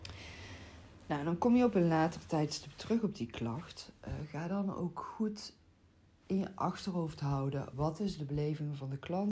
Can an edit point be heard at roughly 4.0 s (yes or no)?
no